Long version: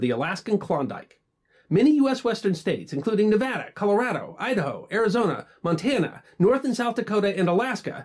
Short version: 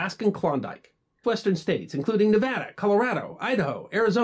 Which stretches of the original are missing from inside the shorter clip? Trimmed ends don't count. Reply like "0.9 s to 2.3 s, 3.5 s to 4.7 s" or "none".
1.5 s to 2.2 s